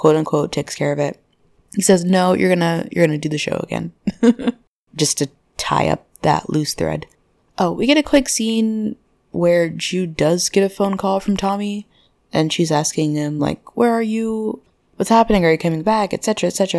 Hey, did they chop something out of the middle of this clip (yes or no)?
no